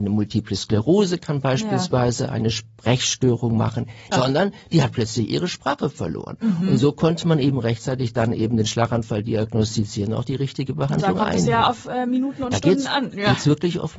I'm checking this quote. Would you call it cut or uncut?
cut